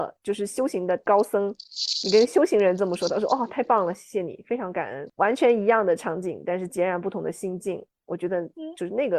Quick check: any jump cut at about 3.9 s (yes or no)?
no